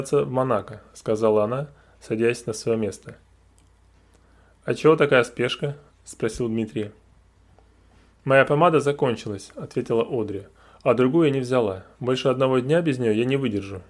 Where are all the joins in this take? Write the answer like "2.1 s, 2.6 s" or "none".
none